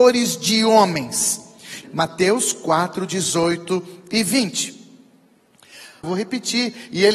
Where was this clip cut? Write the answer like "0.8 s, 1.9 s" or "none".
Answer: 1.8 s, 6.0 s